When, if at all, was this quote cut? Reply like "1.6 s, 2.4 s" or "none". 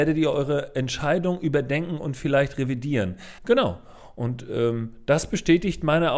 3.4 s